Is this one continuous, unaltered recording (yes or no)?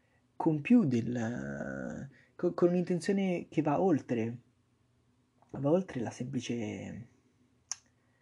yes